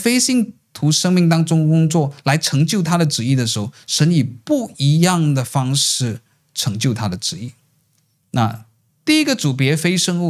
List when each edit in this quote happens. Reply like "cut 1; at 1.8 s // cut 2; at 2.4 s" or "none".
none